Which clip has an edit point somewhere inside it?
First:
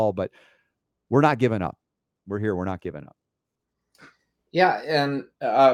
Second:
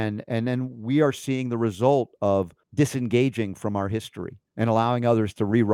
second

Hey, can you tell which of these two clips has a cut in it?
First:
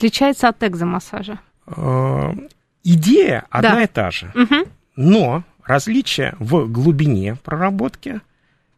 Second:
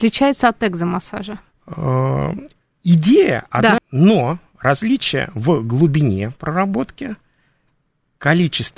second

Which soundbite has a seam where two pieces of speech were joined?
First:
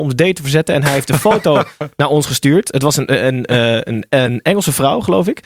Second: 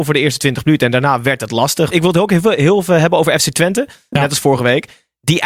second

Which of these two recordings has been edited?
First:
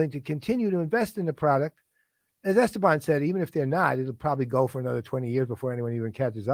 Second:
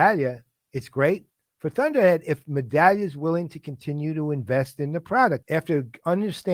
second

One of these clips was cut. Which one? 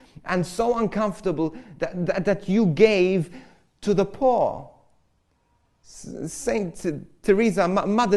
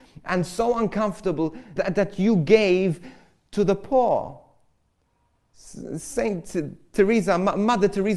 second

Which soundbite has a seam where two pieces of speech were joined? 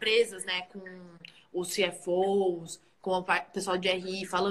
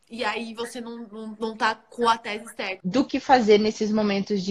second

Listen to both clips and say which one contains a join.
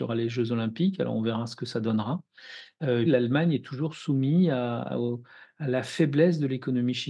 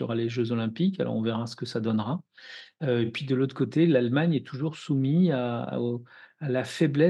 first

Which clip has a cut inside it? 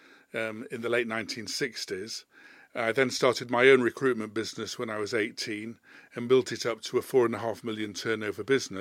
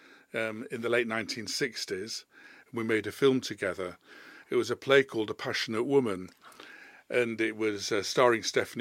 second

